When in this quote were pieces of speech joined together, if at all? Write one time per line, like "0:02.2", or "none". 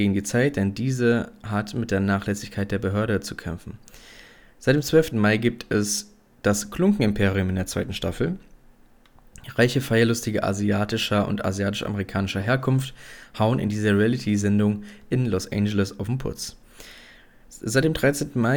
0:05.1